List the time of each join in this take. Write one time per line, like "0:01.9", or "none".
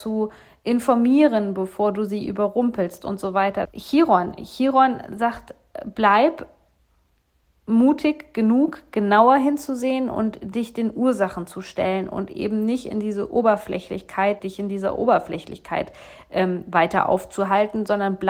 0:03.6
0:14.4